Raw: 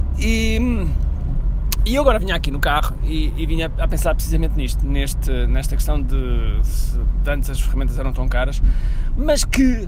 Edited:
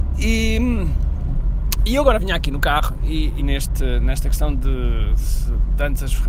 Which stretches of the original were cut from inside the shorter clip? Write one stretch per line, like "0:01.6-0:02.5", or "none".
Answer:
0:03.4-0:04.9